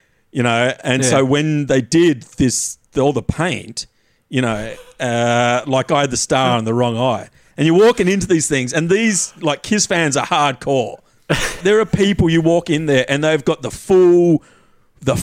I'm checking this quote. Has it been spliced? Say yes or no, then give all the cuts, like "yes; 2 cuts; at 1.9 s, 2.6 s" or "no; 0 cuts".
yes; 1 cut; at 11.6 s